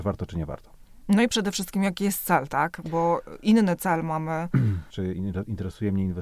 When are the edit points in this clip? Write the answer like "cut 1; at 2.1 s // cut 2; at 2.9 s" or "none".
cut 1; at 4.9 s